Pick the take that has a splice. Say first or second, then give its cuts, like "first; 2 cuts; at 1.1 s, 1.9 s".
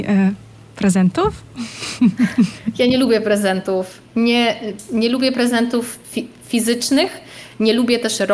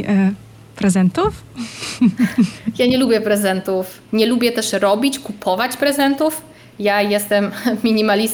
second; 1 cut; at 4.1 s